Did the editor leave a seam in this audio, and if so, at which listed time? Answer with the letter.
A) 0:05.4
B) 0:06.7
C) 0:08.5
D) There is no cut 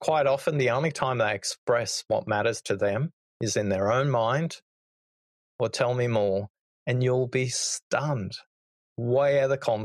A